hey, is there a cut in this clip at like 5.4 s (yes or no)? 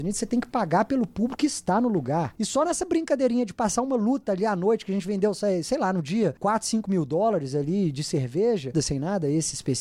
no